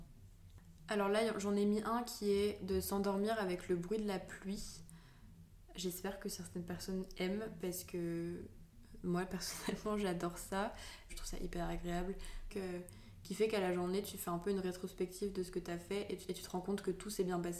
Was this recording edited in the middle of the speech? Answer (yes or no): yes